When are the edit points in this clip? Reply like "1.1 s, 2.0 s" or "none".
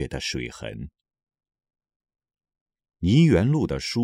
none